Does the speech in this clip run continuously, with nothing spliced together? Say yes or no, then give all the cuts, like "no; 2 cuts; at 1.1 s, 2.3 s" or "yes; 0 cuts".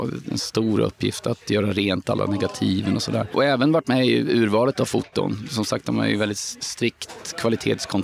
yes; 0 cuts